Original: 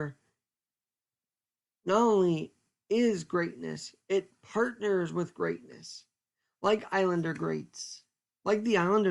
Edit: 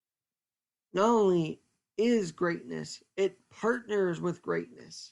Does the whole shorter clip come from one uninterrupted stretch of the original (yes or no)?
yes